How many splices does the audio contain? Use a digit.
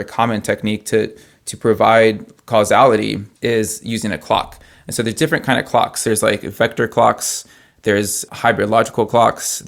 2